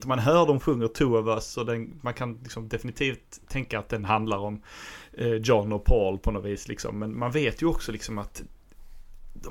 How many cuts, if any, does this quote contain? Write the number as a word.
zero